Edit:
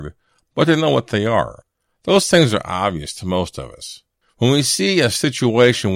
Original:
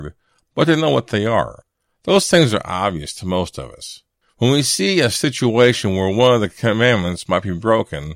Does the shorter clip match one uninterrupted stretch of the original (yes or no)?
yes